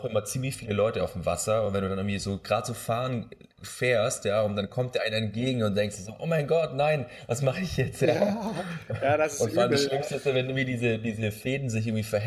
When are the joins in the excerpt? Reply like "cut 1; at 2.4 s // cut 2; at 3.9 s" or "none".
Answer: none

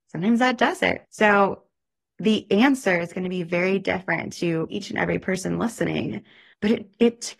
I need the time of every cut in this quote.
cut 1; at 4.7 s

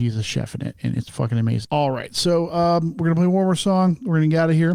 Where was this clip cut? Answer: cut 1; at 1.6 s

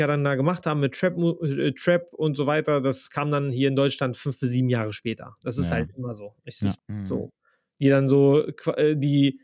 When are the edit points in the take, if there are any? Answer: cut 1; at 6.8 s

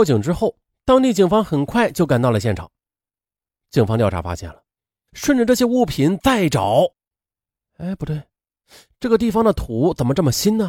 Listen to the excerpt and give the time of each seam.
cut 1; at 5.1 s

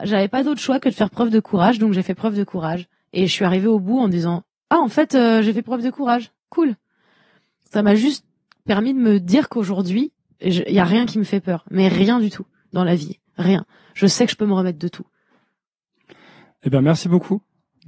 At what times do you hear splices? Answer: none

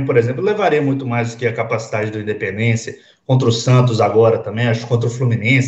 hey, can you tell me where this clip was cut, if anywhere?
none

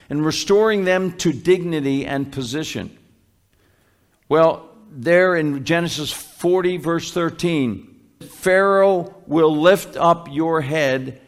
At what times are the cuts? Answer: cut 1; at 4.1 s // cut 2; at 8.2 s

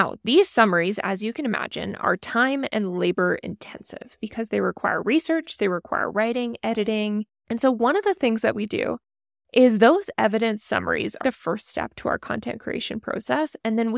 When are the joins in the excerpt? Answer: cut 1; at 7.4 s // cut 2; at 11.2 s

